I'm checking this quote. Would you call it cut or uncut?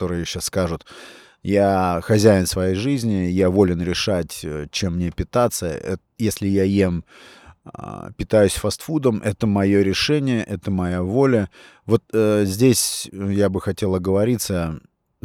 uncut